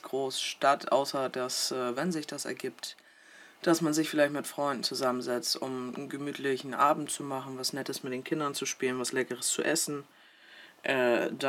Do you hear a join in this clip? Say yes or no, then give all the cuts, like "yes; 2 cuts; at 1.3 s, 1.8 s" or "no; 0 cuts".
no; 0 cuts